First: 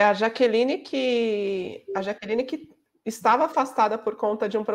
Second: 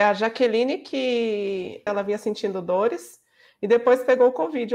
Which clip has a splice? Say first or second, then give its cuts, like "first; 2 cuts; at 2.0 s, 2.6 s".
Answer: second; 1 cut; at 1.9 s